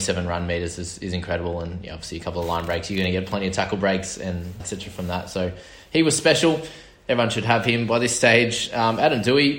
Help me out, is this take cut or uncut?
cut